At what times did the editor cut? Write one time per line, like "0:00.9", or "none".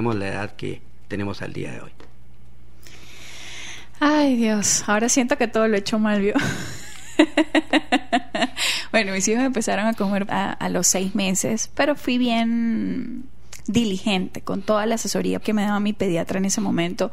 0:10.3
0:15.4